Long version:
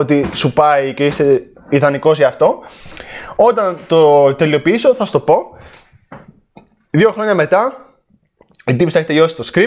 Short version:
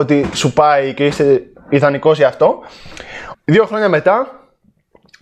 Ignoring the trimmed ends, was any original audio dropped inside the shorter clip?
yes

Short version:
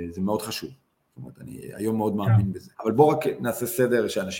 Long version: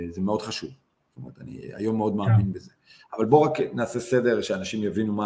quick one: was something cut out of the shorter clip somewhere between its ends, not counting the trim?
yes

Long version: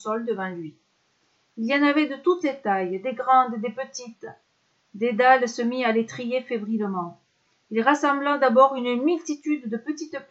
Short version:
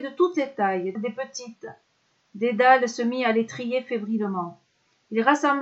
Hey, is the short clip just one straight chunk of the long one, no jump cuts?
no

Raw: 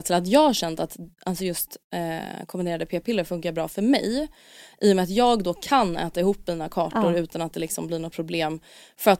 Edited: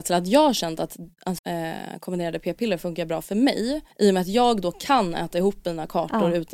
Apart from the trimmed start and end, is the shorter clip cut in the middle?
yes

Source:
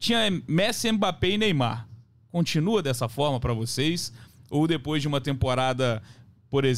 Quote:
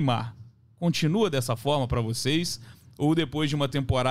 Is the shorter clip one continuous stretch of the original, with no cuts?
yes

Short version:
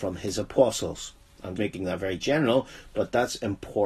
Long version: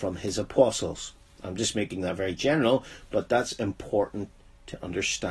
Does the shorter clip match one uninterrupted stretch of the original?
no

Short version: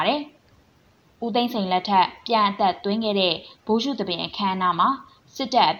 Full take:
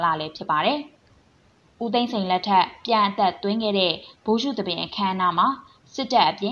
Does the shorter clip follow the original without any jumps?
yes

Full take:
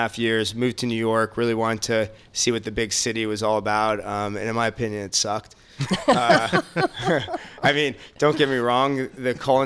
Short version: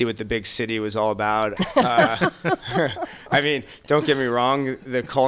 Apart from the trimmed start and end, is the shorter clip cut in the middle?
yes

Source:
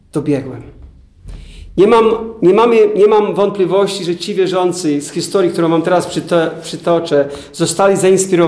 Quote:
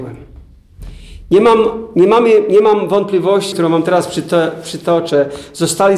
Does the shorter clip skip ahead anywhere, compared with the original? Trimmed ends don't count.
yes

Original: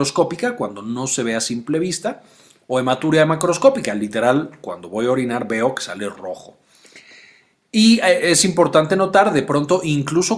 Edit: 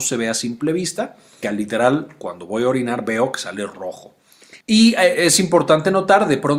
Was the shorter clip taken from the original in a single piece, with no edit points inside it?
no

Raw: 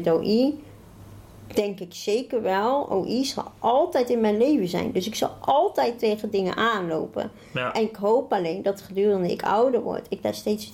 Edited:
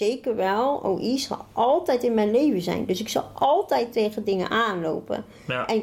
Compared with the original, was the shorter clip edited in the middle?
no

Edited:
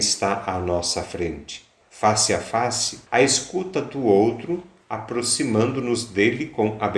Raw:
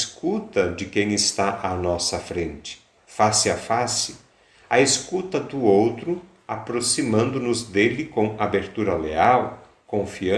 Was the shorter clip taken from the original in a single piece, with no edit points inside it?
no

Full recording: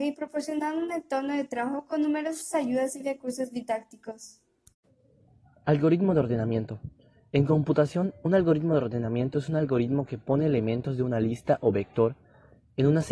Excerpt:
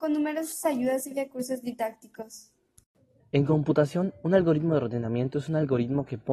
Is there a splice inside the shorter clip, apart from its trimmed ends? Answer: yes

